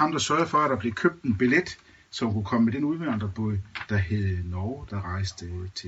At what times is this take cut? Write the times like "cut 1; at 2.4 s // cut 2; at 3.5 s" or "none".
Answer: cut 1; at 4.9 s